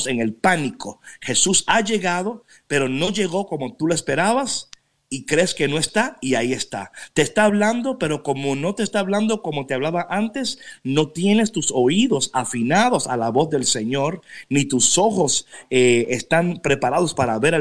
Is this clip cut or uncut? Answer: uncut